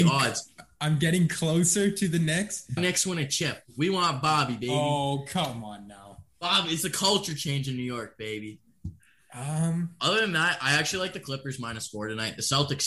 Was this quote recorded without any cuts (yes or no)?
no